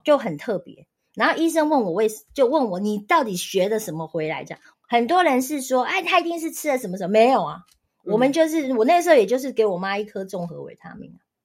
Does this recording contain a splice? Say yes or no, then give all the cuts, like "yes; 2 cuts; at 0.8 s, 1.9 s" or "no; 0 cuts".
yes; 1 cut; at 4.7 s